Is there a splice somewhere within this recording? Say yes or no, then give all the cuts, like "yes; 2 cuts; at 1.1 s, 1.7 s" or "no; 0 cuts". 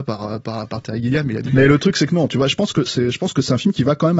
yes; 2 cuts; at 1.5 s, 2.8 s